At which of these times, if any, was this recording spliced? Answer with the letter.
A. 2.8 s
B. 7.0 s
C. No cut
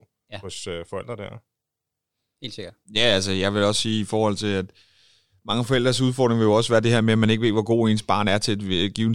A